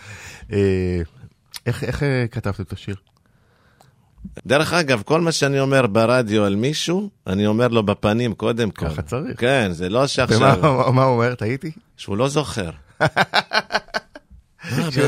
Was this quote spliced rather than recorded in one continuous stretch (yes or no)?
yes